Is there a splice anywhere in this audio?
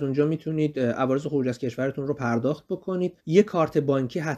yes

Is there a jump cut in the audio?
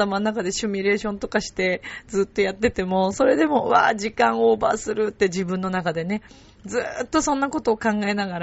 no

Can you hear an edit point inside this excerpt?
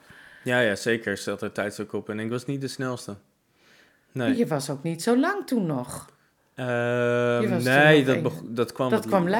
no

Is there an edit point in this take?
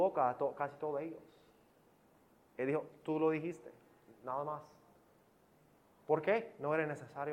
no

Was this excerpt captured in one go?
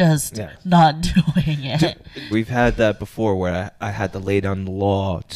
no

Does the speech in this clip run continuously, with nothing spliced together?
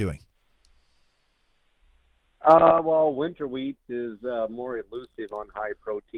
yes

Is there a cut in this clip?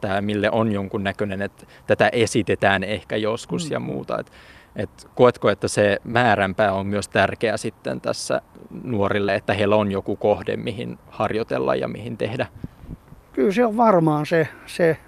no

